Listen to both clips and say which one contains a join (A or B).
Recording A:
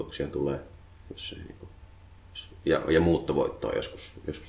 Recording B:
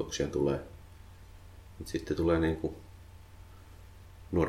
A